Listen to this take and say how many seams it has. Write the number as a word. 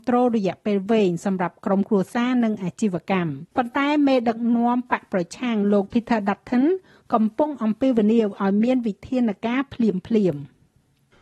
one